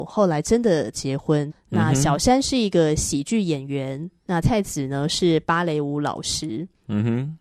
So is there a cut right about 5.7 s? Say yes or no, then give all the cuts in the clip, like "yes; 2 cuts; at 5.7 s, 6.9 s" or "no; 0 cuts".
no; 2 cuts; at 1.5 s, 4.4 s